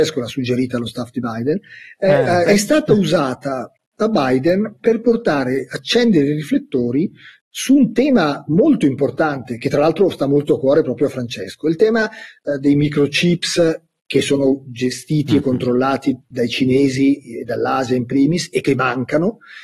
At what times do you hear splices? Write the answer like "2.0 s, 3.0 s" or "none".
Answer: 2.4 s